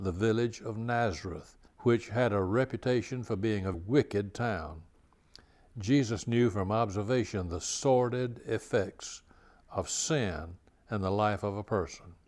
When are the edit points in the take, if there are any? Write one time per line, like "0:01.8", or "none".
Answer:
0:01.7
0:03.7